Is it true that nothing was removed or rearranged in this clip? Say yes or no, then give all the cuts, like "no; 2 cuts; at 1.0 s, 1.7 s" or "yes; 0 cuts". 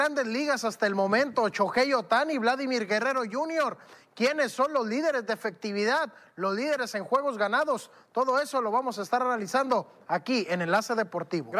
yes; 0 cuts